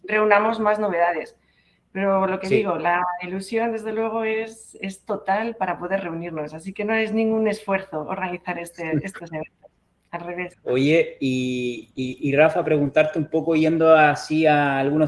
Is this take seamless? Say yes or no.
no